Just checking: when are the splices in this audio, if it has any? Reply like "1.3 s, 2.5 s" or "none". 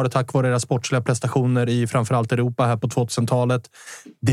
none